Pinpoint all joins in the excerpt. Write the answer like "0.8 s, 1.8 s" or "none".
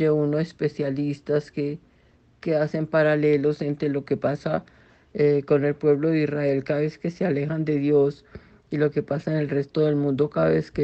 none